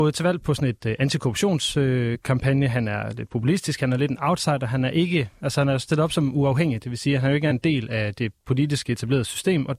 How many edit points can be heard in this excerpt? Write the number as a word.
zero